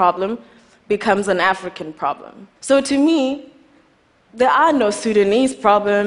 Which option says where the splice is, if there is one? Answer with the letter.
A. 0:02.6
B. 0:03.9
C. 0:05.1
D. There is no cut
A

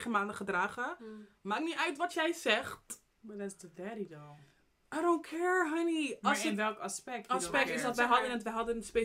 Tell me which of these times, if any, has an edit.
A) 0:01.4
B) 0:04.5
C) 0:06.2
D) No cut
D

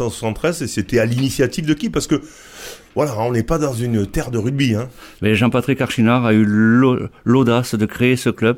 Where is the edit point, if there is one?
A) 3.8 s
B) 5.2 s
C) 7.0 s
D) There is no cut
B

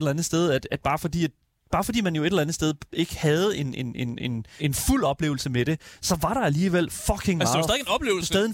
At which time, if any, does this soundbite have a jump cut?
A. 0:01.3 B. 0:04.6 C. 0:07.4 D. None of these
B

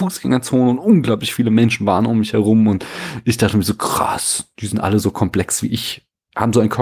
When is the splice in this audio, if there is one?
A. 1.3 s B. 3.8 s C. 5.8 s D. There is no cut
D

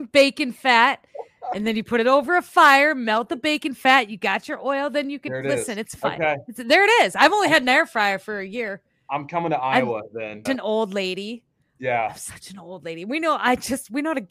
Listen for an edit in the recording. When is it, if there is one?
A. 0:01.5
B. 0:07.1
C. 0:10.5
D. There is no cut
C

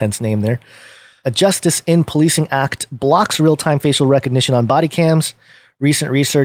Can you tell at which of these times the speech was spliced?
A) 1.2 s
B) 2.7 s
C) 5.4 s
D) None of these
A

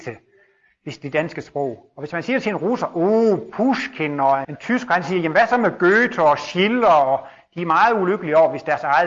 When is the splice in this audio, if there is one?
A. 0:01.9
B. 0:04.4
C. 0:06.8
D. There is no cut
B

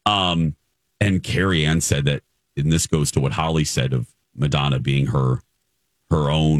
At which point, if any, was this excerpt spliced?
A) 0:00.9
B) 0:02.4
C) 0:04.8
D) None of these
C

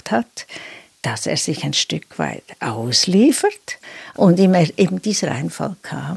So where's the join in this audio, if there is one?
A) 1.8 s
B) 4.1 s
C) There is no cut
B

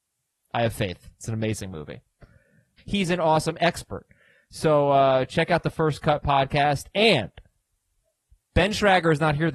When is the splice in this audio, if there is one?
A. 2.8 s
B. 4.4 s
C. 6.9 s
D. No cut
A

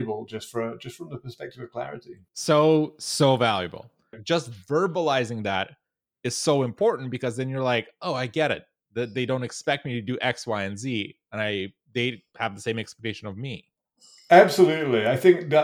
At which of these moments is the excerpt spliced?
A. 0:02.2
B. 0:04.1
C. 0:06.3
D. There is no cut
B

